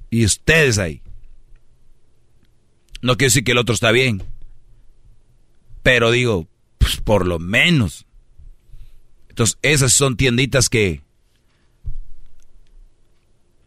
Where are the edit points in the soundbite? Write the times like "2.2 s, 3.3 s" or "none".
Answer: none